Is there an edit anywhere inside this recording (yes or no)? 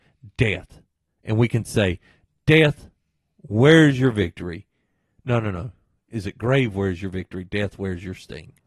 no